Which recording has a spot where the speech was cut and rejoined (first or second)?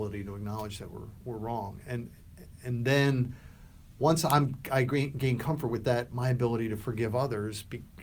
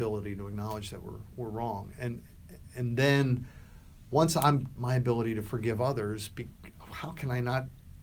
second